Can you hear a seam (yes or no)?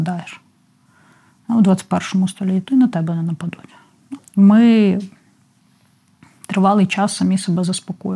yes